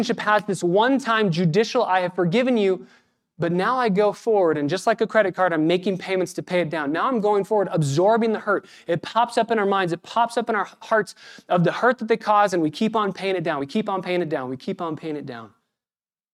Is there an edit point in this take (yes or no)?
no